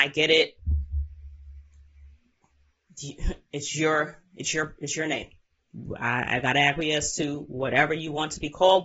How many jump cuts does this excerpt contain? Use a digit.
0